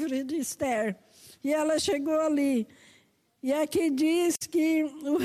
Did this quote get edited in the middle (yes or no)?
no